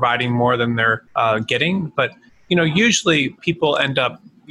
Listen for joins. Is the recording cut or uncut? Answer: cut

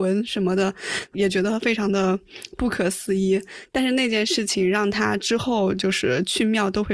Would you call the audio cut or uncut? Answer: cut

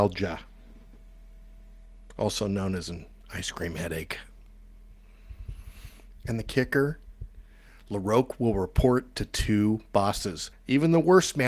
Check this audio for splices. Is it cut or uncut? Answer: cut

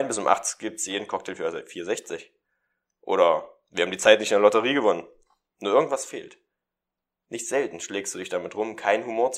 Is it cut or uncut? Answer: uncut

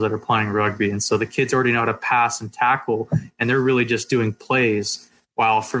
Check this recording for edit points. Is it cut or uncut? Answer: uncut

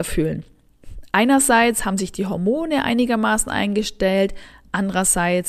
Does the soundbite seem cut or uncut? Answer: uncut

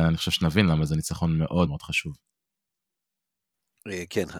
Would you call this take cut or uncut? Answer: cut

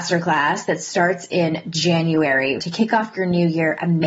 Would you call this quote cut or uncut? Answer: cut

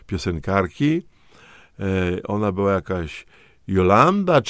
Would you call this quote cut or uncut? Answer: uncut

